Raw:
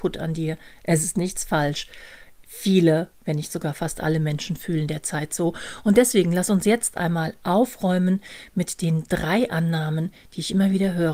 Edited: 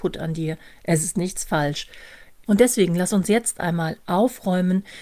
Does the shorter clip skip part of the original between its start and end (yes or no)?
yes